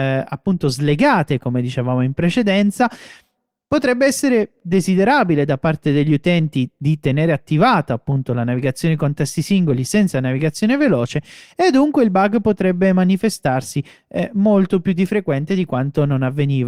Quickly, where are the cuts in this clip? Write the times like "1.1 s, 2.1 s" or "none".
none